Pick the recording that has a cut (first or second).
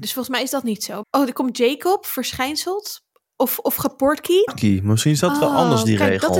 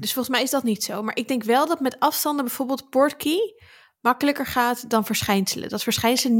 first